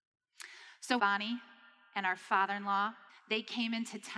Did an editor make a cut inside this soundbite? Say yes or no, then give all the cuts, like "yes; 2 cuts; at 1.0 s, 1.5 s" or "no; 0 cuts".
yes; 2 cuts; at 1.0 s, 3.1 s